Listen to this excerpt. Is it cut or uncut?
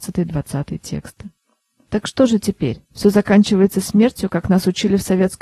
cut